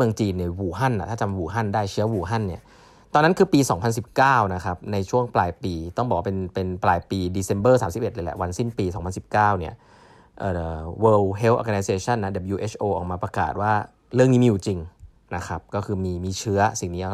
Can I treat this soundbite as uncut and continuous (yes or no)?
yes